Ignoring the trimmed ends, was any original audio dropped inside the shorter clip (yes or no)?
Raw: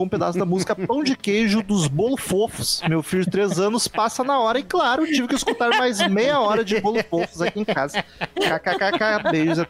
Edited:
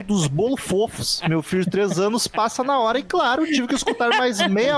no